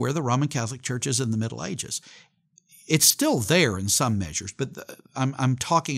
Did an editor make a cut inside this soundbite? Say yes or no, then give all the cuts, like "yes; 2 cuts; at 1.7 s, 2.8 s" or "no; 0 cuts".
no; 0 cuts